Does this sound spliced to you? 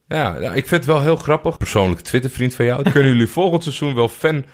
yes; 2 cuts; at 1.6 s, 2.8 s

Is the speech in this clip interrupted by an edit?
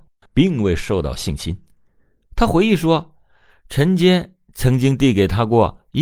yes; 1 cut; at 2.3 s

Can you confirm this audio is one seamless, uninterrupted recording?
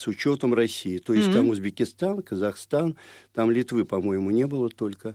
yes; 0 cuts

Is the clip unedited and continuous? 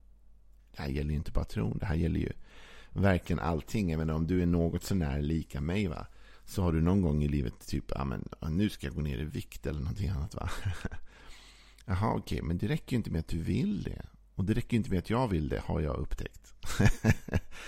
yes; 0 cuts

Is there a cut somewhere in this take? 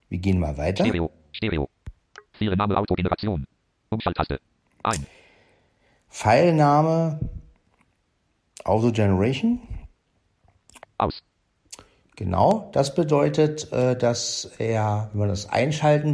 yes; 1 cut; at 10.8 s

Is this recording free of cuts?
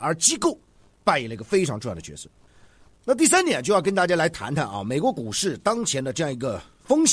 yes; 0 cuts

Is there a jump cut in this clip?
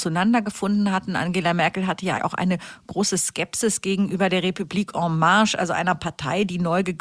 yes; 1 cut; at 2.2 s

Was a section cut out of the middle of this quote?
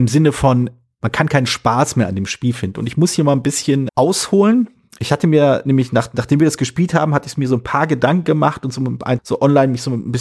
yes; 2 cuts; at 3.9 s, 9.2 s

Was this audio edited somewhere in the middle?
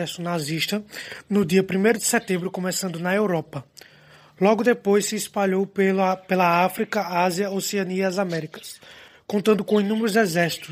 no; 0 cuts

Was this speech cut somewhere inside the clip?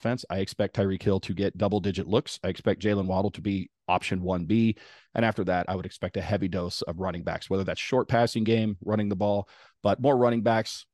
no; 0 cuts

